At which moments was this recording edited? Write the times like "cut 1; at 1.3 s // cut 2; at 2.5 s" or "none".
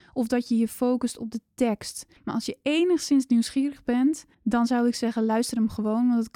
cut 1; at 2.2 s // cut 2; at 4.3 s